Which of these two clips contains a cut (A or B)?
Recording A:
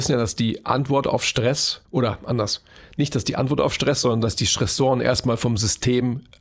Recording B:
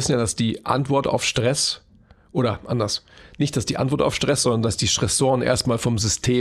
A